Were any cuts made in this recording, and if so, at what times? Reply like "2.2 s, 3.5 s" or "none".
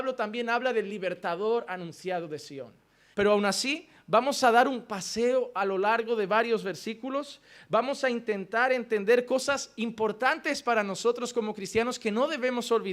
3.1 s